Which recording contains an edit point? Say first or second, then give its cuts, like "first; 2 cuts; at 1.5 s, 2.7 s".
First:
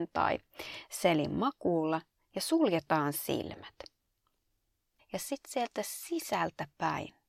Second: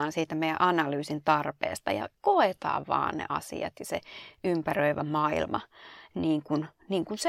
first; 1 cut; at 5.0 s